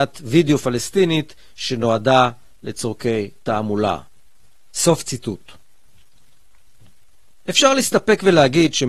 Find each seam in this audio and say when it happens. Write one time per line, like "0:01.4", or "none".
none